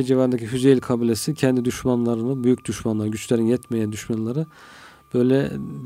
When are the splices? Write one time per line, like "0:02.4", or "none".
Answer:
none